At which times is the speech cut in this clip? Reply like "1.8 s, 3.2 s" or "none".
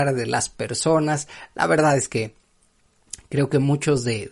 none